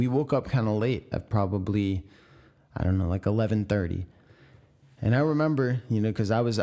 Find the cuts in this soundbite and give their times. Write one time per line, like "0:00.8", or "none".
none